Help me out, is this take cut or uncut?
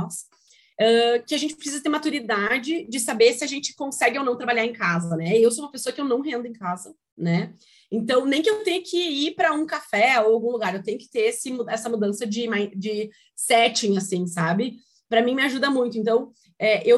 uncut